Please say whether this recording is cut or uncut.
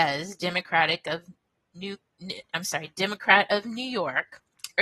uncut